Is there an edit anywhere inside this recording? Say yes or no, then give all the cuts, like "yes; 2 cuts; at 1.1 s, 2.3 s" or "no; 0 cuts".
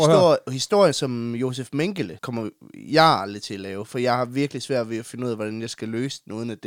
yes; 1 cut; at 2.2 s